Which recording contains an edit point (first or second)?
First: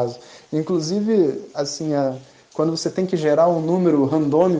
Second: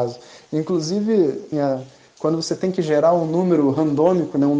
second